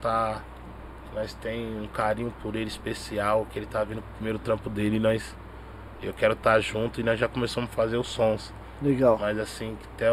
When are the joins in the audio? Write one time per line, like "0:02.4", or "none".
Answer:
none